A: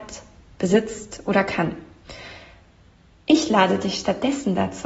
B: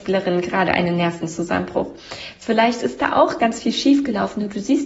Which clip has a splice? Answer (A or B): B